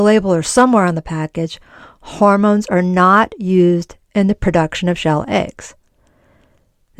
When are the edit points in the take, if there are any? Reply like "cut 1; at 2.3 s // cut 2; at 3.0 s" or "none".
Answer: none